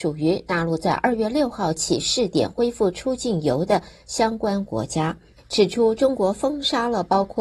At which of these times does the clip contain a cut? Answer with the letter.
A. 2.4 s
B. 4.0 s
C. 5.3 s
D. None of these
C